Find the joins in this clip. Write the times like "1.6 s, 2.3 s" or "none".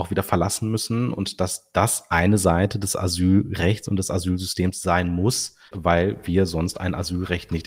5.7 s